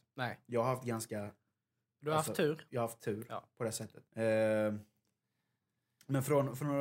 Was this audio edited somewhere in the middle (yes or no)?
yes